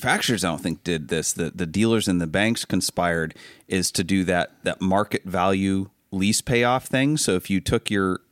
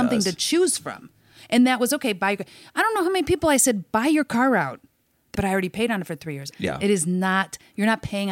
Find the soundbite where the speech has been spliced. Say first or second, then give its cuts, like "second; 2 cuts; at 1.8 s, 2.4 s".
second; 2 cuts; at 5.3 s, 6.5 s